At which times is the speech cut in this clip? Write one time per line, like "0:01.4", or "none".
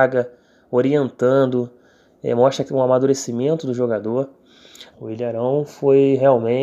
0:04.9